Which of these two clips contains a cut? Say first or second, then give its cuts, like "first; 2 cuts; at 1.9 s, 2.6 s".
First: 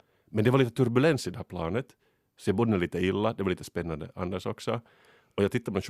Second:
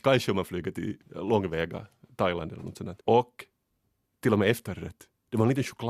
second; 2 cuts; at 1.0 s, 3.0 s